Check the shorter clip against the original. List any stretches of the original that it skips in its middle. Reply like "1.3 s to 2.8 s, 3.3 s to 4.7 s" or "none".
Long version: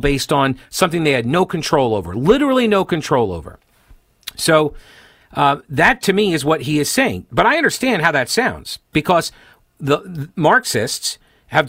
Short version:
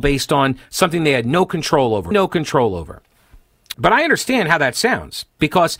2.1 s to 2.7 s, 4.3 s to 7.3 s